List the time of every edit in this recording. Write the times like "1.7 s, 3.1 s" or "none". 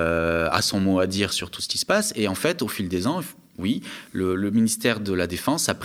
none